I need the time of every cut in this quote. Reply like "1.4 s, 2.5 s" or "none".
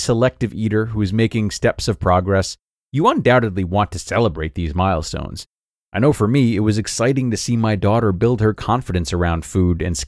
5.9 s